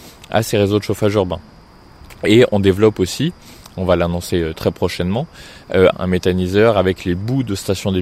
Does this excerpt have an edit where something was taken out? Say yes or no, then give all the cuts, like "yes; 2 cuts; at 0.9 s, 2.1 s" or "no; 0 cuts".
yes; 1 cut; at 5.9 s